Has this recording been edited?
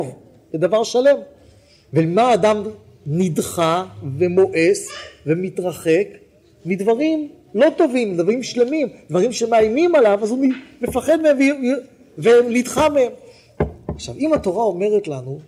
no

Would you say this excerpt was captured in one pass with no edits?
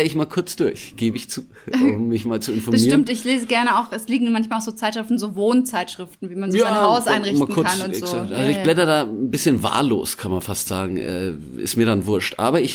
yes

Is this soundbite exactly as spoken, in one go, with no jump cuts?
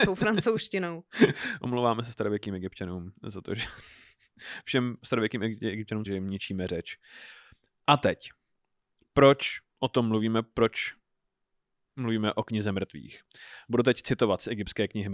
no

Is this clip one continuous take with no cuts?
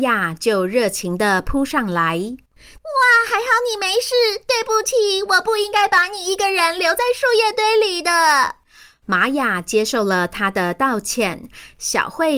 yes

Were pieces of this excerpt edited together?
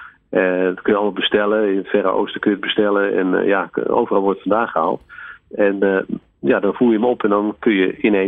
no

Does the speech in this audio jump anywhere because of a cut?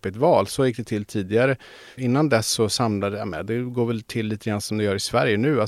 yes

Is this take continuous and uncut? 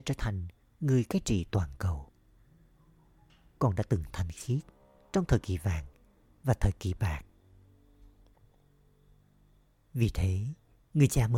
yes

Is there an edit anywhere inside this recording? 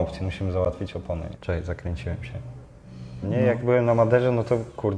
yes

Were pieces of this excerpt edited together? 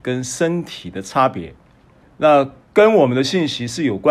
yes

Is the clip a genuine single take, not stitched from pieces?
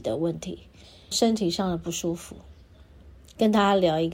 no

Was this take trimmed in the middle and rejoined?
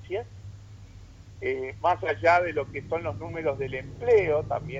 no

